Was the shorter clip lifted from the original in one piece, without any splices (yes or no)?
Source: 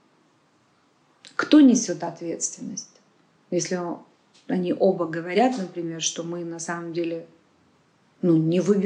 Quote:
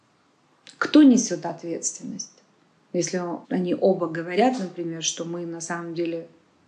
no